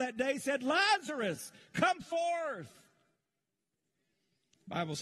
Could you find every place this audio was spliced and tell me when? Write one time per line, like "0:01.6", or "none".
none